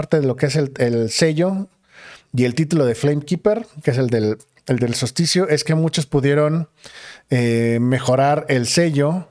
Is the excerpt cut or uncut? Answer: uncut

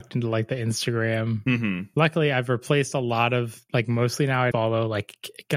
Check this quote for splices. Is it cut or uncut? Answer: cut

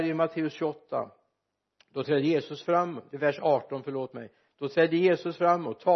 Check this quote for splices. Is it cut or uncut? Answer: uncut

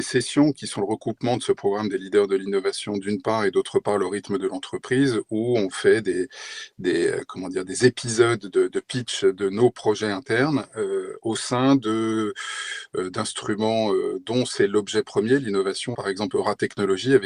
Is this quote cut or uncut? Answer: cut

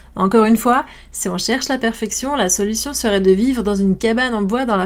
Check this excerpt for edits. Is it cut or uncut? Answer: uncut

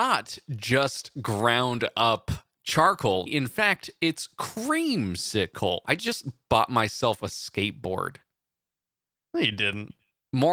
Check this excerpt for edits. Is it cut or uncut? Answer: cut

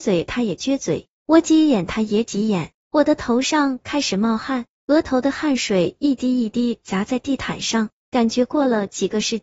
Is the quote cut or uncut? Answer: cut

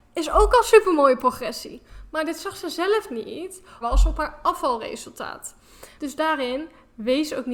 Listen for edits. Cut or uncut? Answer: cut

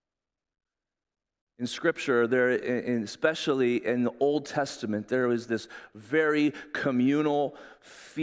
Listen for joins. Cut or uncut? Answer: uncut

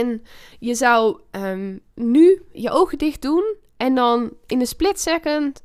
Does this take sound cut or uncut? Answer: cut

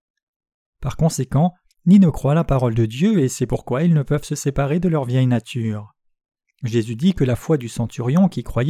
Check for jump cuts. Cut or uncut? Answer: cut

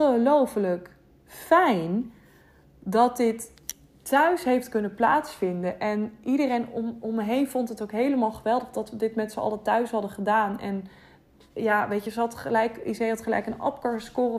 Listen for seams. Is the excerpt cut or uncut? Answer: uncut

